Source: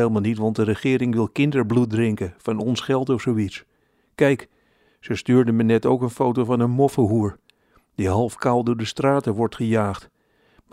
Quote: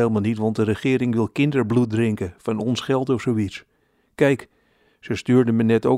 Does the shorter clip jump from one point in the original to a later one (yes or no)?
no